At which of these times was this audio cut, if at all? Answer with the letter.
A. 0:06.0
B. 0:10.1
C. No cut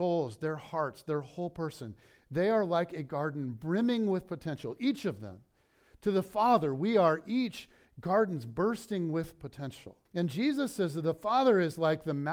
B